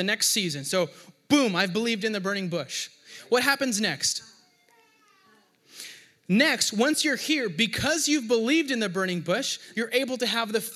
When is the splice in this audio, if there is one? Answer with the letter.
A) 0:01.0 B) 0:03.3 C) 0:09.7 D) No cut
C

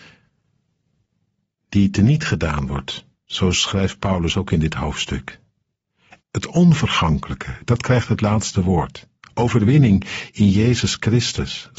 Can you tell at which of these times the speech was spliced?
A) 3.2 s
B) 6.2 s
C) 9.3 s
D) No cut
B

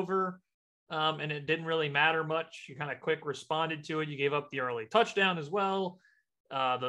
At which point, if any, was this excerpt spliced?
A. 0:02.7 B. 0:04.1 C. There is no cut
C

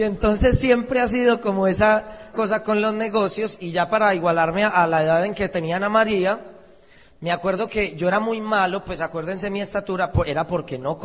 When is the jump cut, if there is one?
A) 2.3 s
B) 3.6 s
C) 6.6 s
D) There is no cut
A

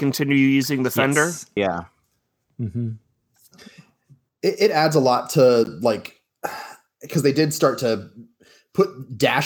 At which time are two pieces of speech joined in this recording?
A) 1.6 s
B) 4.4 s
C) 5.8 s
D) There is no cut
A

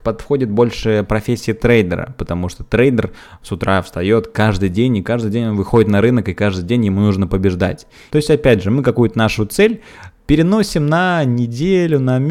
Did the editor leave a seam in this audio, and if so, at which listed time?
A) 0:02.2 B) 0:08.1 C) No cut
B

